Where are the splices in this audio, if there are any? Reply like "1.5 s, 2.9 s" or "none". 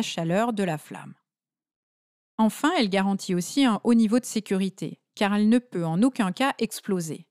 none